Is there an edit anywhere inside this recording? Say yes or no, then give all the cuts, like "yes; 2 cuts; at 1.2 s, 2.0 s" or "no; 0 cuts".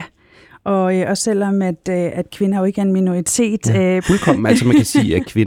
yes; 1 cut; at 4.0 s